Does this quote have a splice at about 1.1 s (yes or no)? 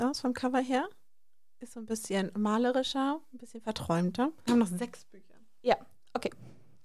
no